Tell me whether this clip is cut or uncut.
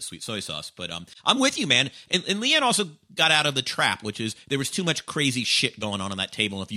uncut